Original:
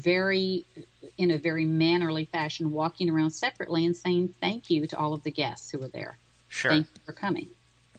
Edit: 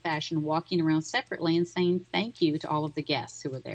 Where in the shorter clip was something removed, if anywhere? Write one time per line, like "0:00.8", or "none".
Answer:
none